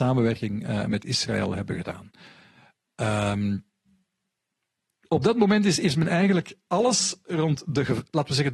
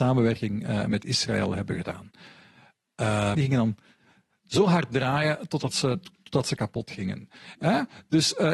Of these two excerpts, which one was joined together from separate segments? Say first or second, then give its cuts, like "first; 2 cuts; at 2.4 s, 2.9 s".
second; 2 cuts; at 3.3 s, 7.5 s